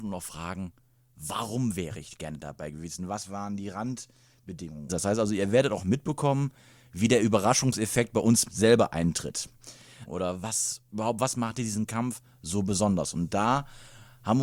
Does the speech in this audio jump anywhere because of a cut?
yes; 2 cuts; at 4.9 s, 10.1 s

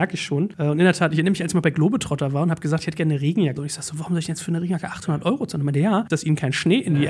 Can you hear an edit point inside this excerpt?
yes; 2 cuts; at 3.6 s, 6.1 s

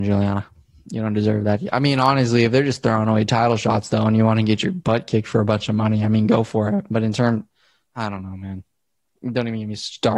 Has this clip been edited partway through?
no; 0 cuts

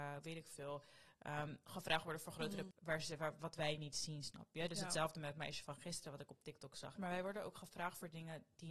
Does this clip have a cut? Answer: yes; 2 cuts; at 2.7 s, 7.0 s

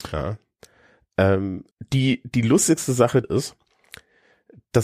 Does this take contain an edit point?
yes; 2 cuts; at 1.7 s, 3.2 s

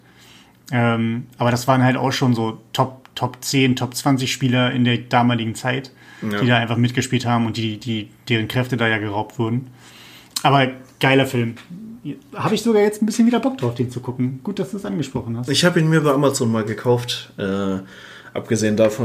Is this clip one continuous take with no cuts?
yes; 0 cuts

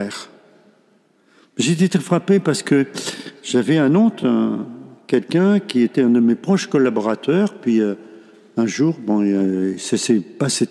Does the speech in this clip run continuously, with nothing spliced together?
yes; 0 cuts

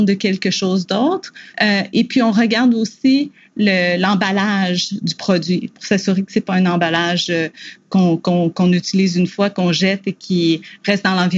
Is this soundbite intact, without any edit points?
no; 1 cut; at 1.5 s

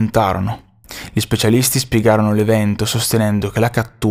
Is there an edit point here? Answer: no; 0 cuts

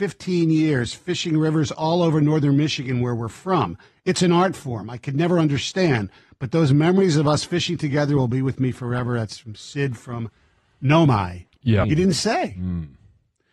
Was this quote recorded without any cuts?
no; 1 cut; at 11.8 s

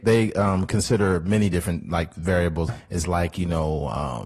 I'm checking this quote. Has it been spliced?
yes; 1 cut; at 2.7 s

